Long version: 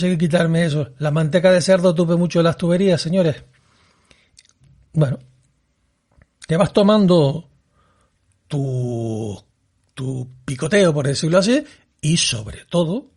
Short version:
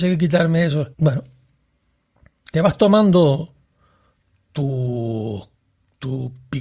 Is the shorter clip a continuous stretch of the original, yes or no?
no